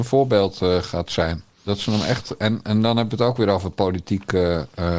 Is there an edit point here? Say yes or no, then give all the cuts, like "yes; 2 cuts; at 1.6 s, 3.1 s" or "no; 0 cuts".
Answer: yes; 1 cut; at 1.5 s